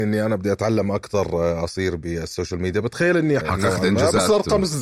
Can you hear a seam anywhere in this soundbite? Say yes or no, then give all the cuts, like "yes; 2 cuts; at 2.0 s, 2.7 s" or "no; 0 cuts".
yes; 1 cut; at 3.4 s